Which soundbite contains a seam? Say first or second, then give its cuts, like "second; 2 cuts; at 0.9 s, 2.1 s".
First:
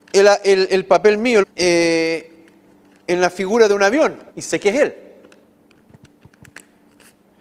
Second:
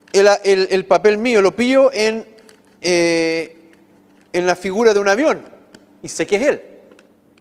first; 2 cuts; at 1.4 s, 4.3 s